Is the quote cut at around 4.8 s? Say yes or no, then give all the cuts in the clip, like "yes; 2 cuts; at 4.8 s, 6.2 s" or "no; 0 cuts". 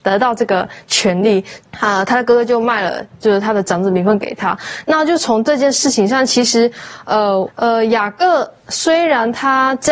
no; 2 cuts; at 1.6 s, 7.5 s